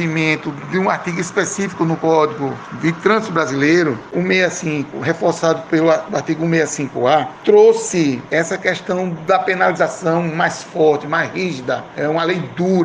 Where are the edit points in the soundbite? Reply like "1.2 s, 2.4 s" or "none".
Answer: 4.1 s